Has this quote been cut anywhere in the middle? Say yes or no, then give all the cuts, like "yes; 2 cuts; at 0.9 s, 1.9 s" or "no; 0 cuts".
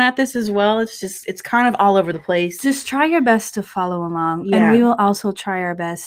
no; 0 cuts